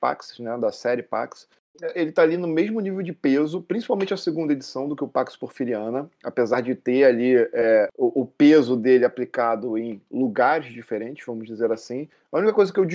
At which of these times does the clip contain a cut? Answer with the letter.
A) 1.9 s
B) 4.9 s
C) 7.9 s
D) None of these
A